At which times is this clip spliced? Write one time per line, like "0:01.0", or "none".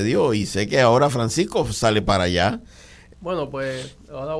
0:03.1